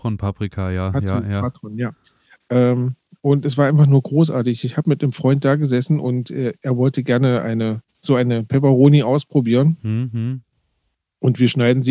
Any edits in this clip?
yes; 1 cut; at 7.9 s

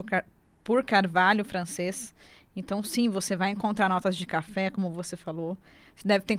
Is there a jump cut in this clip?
no; 0 cuts

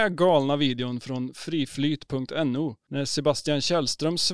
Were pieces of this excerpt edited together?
no; 0 cuts

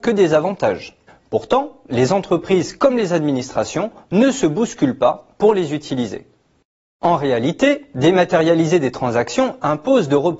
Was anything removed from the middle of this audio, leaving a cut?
yes; 1 cut; at 1.1 s

